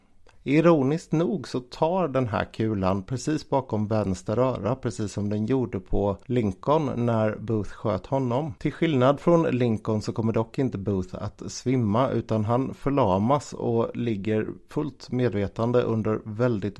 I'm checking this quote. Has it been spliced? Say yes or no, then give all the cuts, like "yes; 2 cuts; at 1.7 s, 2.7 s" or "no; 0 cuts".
no; 0 cuts